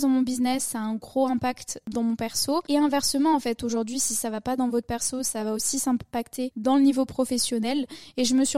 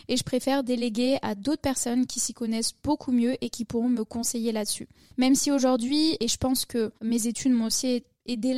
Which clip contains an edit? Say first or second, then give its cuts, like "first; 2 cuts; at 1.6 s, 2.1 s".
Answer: second; 1 cut; at 7.0 s